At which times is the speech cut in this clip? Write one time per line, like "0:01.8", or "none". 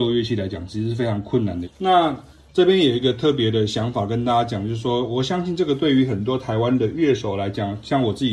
0:01.6